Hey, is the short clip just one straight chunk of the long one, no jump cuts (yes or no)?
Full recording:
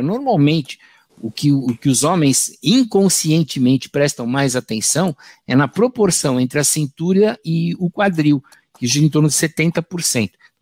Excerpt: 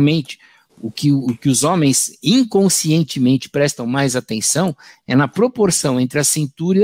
yes